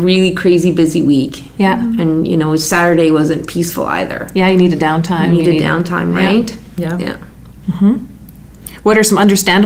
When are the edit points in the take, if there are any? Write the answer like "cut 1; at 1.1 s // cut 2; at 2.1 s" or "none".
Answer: none